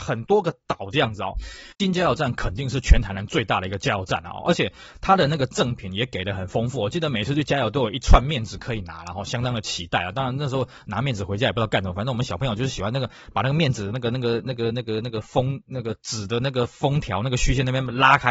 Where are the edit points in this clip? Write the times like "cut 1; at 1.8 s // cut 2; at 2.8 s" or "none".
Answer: cut 1; at 1.7 s